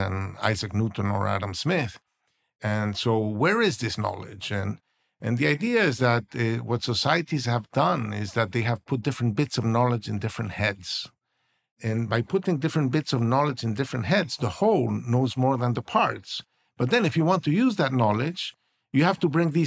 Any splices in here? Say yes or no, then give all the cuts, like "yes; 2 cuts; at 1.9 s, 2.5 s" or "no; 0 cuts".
no; 0 cuts